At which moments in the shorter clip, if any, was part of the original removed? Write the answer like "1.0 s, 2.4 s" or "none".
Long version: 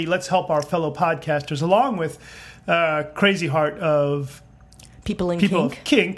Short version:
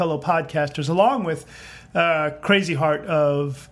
none